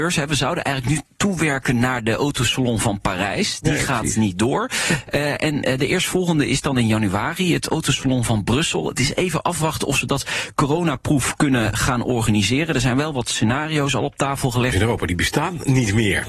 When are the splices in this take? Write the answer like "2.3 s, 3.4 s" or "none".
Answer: 11.7 s, 14.7 s